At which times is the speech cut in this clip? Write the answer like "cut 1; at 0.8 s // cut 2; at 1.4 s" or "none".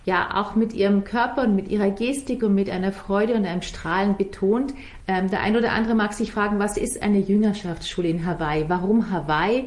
cut 1; at 5.0 s